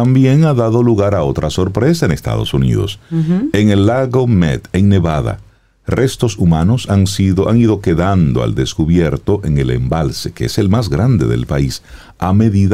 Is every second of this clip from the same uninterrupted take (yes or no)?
yes